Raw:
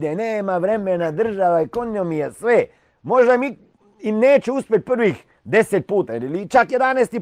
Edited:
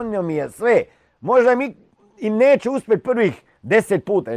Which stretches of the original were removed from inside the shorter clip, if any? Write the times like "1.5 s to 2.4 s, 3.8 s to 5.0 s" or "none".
none